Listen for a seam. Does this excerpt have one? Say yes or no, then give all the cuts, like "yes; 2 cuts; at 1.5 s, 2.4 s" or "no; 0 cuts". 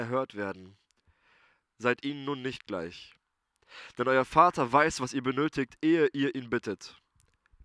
no; 0 cuts